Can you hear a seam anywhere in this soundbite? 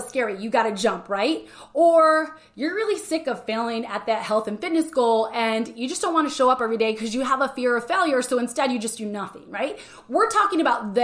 no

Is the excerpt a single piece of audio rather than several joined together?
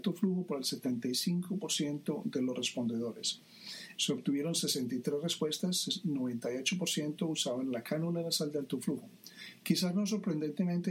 no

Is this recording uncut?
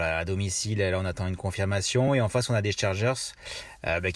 yes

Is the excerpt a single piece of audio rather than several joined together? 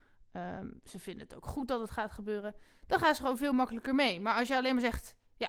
yes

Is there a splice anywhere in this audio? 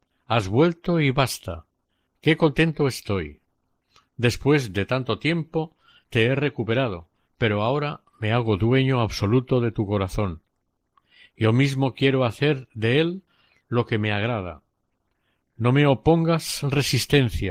no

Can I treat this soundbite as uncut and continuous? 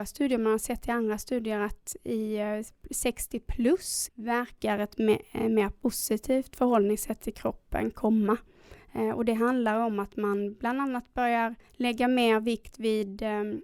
no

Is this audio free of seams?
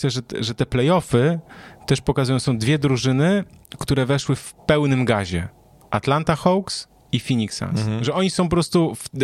no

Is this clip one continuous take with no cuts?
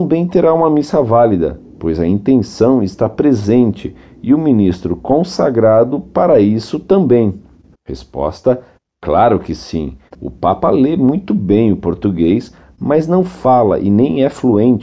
no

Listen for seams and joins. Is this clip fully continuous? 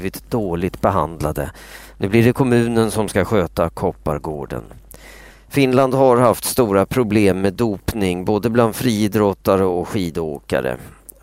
no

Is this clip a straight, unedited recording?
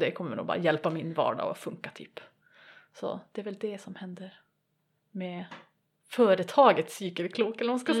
yes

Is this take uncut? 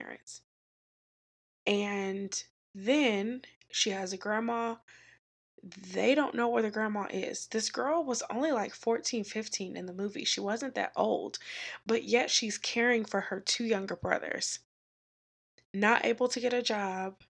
yes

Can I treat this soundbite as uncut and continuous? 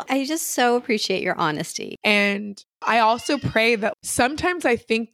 no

